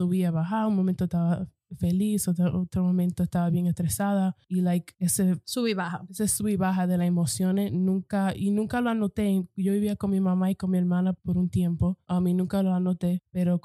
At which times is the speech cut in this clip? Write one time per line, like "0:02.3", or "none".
none